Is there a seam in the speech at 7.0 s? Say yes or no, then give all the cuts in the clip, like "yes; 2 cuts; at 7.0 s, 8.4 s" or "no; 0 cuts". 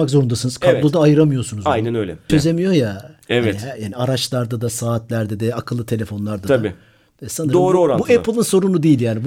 no; 1 cut; at 2.3 s